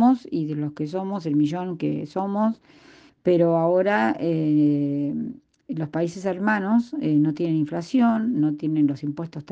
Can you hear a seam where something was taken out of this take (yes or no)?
yes